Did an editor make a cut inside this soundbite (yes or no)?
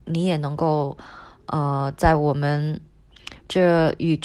no